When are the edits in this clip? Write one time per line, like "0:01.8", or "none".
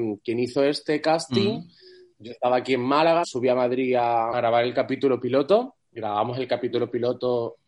0:03.2
0:04.3
0:05.8